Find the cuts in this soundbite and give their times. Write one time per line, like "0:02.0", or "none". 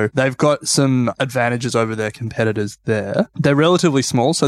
none